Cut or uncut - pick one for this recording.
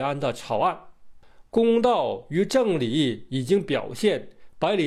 uncut